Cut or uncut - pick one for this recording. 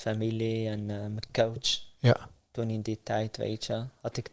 uncut